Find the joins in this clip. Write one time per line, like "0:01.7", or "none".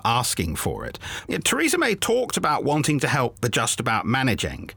0:01.3